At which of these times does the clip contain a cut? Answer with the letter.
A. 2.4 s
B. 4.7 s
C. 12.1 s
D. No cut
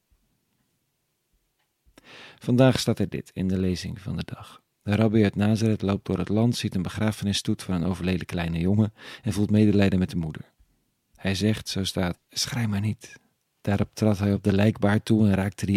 C